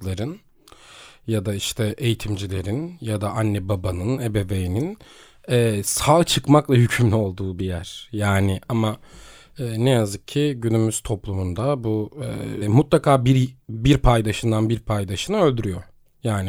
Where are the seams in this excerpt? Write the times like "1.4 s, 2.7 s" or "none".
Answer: 12.6 s